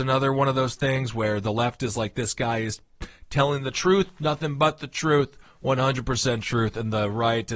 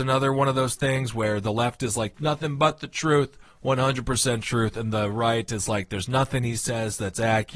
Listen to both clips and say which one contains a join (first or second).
second